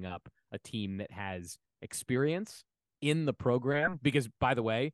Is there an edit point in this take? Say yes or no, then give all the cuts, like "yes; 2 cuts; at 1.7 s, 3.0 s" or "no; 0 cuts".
no; 0 cuts